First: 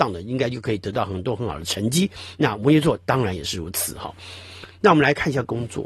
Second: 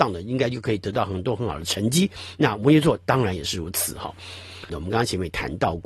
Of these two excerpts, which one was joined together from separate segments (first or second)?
second